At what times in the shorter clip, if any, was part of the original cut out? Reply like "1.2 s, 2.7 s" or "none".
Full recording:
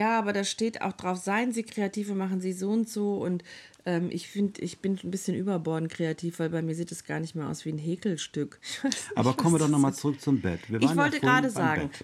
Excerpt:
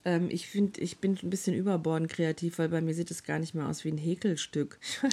none